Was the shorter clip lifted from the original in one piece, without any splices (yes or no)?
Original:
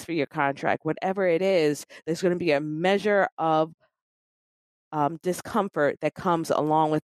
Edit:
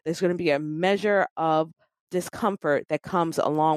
no